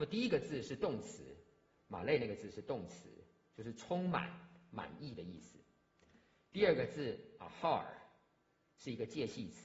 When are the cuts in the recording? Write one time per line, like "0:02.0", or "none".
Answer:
none